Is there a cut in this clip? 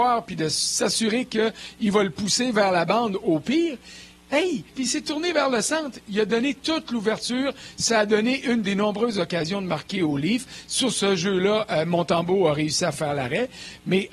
yes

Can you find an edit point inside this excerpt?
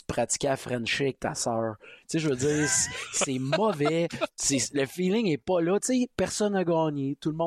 no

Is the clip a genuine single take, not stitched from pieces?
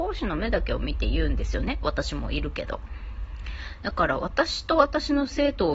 yes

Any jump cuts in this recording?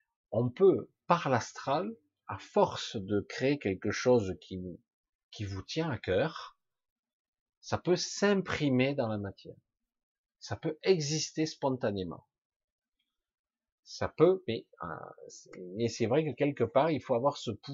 no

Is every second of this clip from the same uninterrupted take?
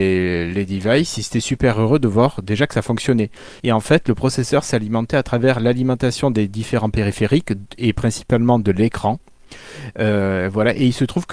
no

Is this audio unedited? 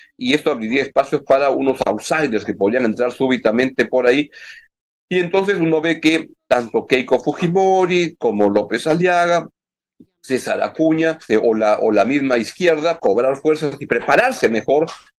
no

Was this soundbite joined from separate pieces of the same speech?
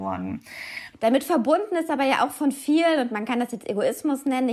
yes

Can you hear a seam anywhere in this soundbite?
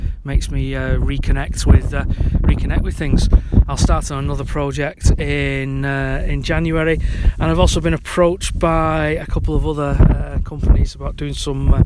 yes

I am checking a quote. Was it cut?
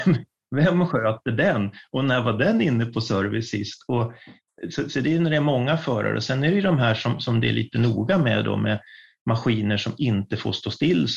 no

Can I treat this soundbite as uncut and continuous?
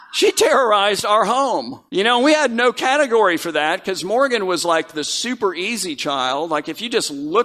no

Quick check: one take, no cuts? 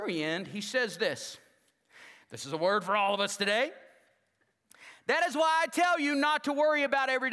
yes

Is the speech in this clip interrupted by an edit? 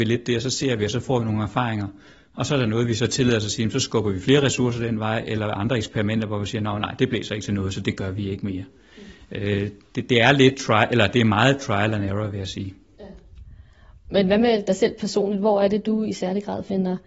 no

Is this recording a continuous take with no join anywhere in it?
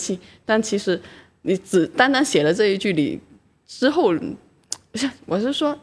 yes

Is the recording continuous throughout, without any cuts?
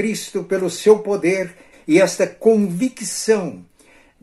no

